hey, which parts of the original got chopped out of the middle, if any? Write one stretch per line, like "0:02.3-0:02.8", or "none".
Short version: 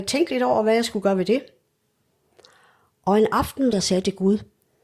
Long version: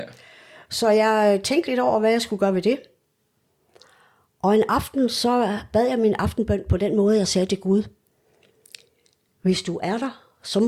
0:05.1-0:07.2